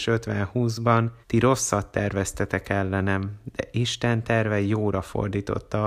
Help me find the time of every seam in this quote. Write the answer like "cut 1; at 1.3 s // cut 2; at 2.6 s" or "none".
cut 1; at 1.2 s